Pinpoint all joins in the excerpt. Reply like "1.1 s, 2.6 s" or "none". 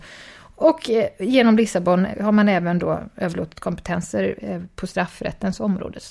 none